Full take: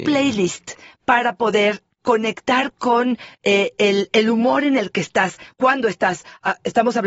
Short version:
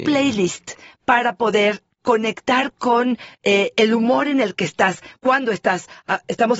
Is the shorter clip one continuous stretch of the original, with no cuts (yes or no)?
no